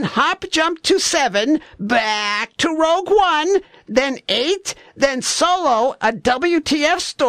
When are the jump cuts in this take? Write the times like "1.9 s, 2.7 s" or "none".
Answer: none